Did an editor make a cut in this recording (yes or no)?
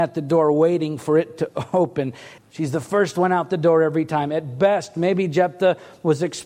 yes